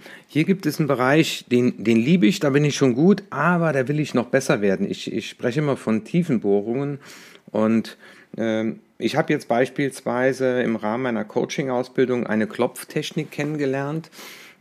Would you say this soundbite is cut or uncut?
uncut